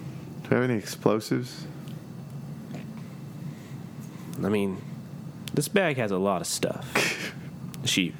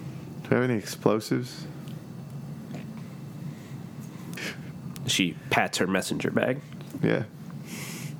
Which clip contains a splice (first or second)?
second